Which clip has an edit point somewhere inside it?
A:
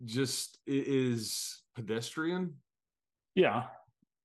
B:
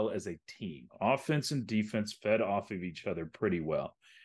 A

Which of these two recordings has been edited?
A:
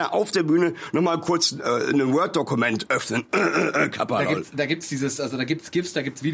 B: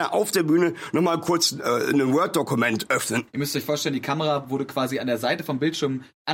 B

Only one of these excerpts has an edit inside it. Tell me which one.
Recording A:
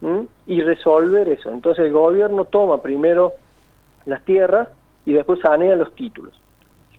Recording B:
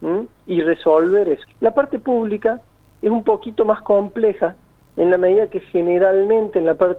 B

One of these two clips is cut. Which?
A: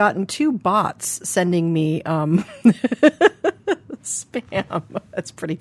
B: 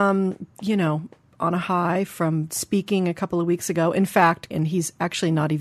B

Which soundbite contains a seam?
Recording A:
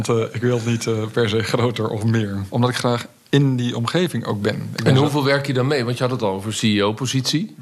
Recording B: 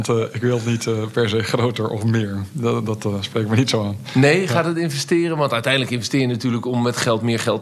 A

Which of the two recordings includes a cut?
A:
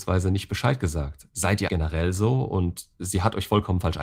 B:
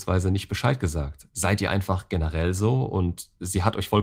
A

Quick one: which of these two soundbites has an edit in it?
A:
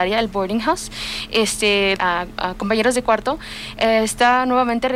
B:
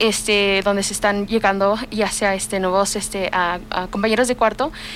A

